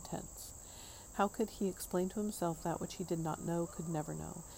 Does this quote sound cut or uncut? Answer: uncut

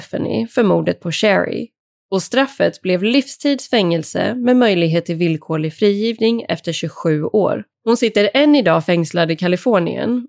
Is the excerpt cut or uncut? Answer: cut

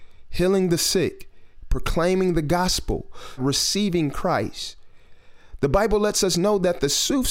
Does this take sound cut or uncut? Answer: cut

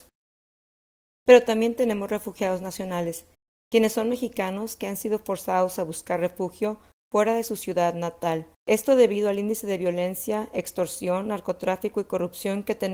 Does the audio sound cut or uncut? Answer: cut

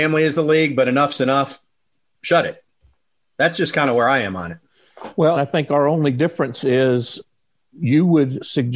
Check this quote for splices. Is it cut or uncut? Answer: cut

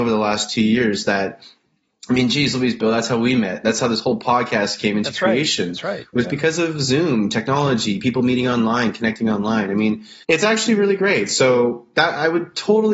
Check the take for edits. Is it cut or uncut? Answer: cut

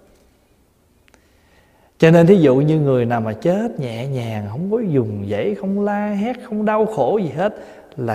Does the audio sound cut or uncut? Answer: uncut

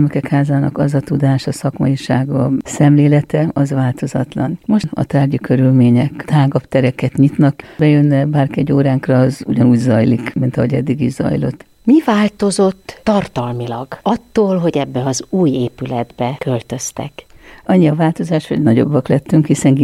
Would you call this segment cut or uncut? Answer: cut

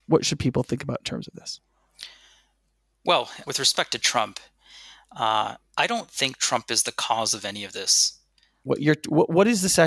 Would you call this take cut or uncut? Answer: cut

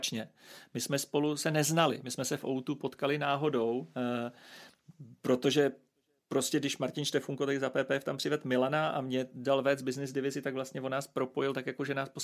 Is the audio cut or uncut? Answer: uncut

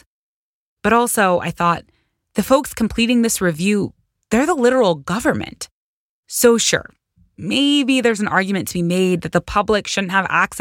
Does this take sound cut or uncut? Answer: uncut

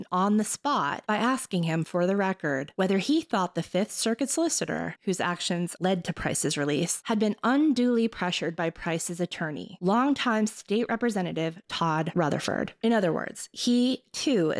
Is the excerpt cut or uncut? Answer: cut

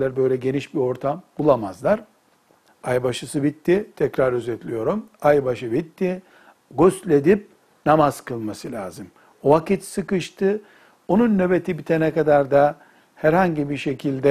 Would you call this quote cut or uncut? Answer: cut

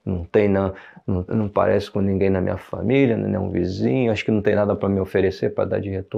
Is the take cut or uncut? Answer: cut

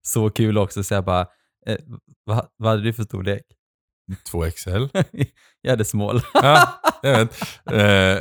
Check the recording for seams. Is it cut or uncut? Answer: uncut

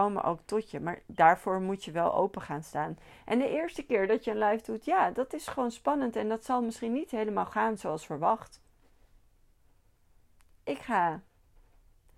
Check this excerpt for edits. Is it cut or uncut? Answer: cut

